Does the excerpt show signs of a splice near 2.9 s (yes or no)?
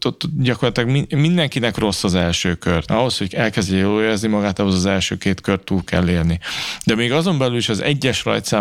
yes